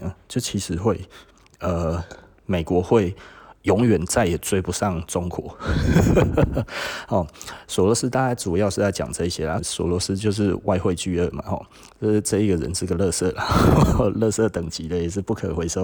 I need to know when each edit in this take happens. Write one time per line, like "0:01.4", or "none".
0:09.6